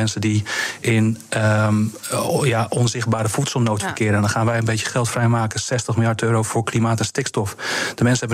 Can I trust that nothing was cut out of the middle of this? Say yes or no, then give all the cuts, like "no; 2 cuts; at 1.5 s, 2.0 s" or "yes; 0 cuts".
yes; 0 cuts